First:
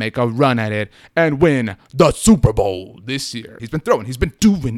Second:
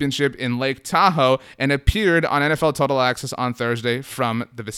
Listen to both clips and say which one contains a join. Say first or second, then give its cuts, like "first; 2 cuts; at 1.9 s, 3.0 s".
first; 1 cut; at 3.6 s